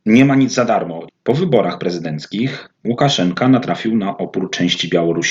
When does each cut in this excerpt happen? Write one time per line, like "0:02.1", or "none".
0:01.1
0:02.8